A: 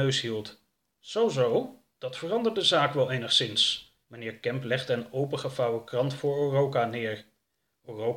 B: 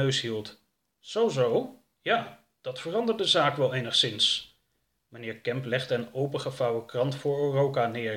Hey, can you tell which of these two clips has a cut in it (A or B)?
A